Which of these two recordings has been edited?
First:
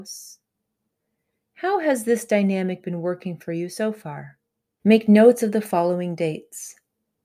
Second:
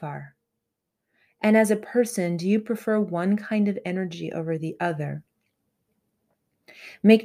first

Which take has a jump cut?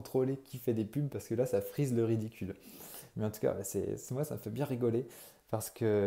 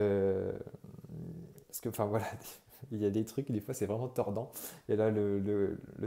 first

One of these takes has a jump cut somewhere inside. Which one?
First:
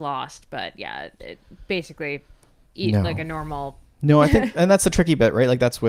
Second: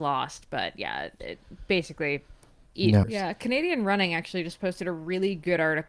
second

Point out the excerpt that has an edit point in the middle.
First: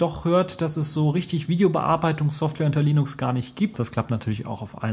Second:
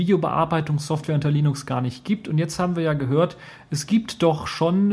first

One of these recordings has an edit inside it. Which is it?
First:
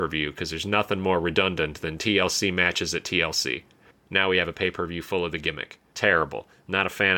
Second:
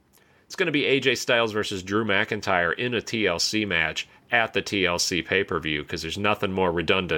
first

